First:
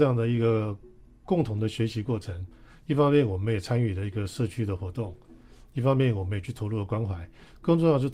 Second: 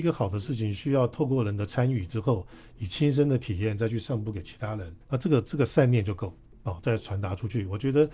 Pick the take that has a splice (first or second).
second